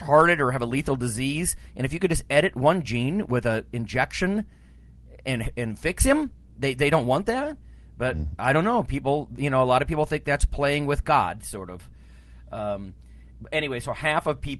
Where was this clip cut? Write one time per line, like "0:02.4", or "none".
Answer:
none